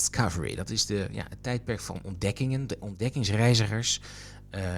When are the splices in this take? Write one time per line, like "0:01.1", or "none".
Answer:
none